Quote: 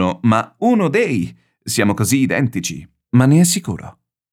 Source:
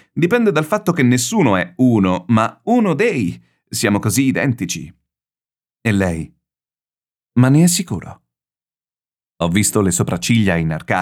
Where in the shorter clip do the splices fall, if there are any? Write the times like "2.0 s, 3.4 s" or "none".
3.1 s